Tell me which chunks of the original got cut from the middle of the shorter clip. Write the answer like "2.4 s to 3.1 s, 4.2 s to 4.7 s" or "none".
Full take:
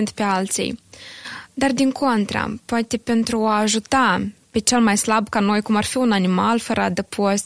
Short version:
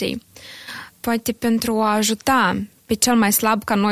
1.5 s to 2.6 s